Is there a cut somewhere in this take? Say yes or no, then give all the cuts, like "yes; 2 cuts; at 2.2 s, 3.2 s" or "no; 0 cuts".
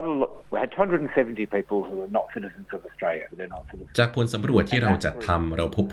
yes; 1 cut; at 3.3 s